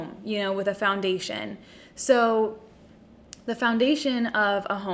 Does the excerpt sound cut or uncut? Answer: uncut